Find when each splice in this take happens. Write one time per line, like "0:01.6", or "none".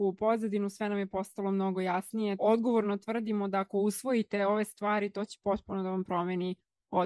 0:02.4